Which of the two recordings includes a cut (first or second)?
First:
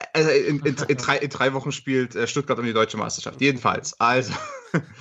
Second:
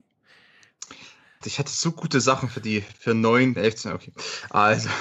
second